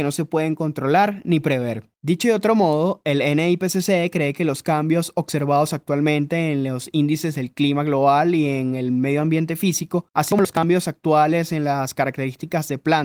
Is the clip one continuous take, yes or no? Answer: no